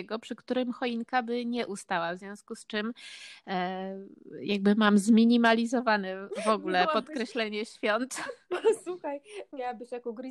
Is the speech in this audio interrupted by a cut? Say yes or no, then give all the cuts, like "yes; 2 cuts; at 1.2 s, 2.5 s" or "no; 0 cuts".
no; 0 cuts